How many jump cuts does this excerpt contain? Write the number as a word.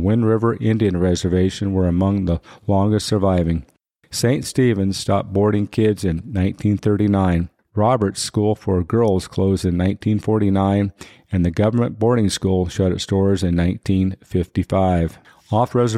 zero